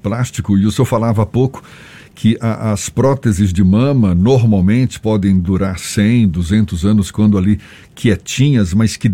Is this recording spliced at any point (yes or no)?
no